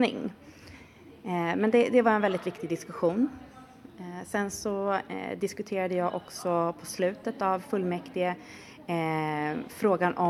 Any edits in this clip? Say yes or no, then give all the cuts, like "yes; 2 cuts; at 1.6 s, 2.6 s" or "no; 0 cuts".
no; 0 cuts